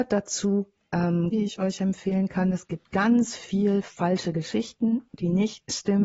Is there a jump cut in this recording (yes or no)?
yes